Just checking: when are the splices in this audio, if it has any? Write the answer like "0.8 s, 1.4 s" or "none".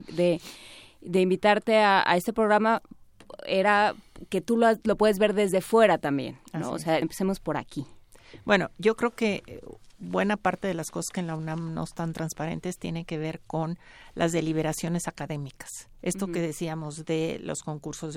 7.0 s